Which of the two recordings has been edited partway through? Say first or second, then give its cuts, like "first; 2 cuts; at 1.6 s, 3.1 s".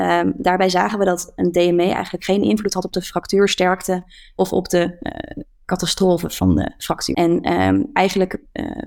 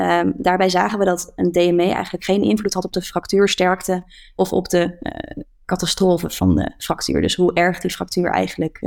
first; 1 cut; at 7.1 s